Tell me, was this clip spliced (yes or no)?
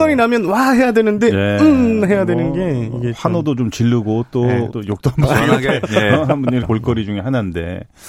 yes